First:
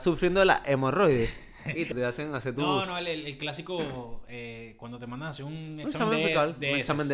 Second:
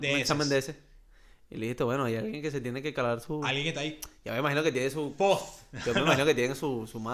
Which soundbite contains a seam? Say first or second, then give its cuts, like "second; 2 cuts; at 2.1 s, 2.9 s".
first; 1 cut; at 1.9 s